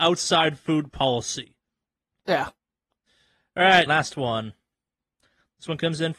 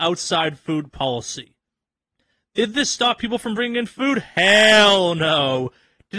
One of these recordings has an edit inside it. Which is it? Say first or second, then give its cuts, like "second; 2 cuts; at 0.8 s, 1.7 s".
first; 2 cuts; at 2.2 s, 3.9 s